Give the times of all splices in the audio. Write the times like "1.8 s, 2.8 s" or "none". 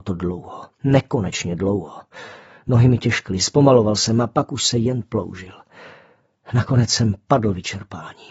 none